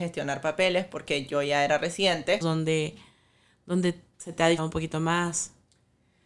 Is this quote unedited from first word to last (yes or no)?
no